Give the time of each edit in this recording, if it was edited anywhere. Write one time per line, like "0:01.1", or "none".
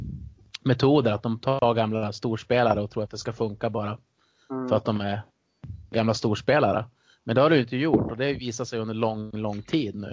none

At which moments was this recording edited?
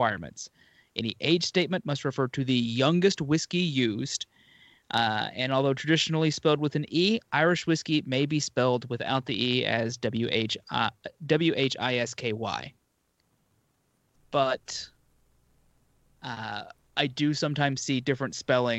0:14.1

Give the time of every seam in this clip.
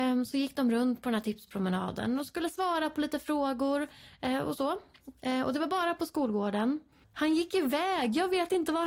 0:07.0

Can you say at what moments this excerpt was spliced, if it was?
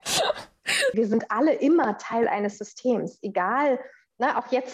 0:00.9

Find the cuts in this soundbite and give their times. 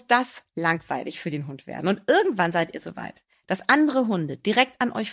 none

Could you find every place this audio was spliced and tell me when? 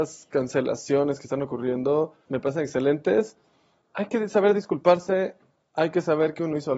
0:02.3

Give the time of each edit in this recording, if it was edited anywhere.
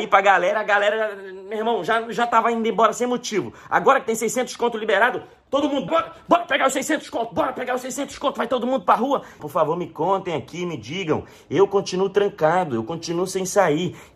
0:05.9
0:09.4

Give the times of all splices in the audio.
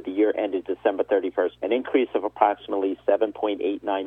0:01.6

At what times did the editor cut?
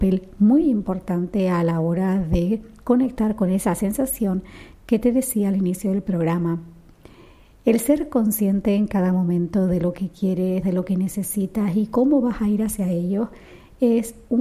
0:10.6

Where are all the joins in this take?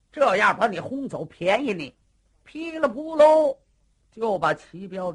0:02.3

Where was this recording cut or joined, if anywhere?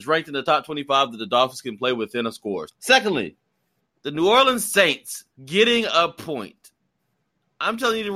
0:02.7
0:05.3

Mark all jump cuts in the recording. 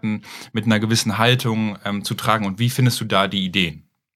none

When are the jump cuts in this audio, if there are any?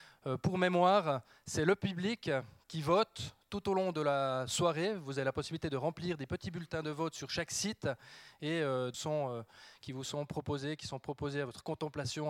0:08.9

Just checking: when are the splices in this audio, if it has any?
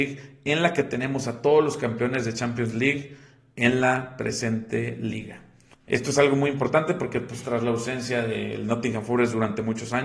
0:05.7

